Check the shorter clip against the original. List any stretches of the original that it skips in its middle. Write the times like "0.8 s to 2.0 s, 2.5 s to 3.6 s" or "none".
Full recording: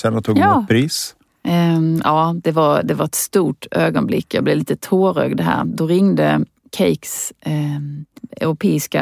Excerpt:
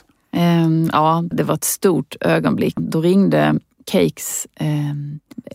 2.4 s to 2.8 s, 4.3 s to 5.6 s